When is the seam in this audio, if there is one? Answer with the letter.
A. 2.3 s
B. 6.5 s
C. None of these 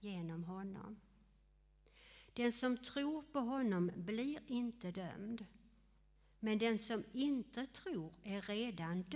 C